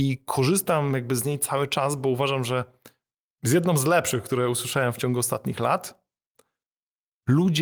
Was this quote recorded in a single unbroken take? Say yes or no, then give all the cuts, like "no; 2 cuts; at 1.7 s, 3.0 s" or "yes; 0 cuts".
yes; 0 cuts